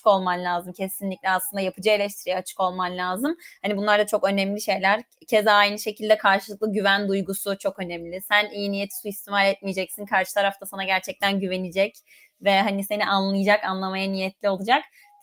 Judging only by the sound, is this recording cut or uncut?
uncut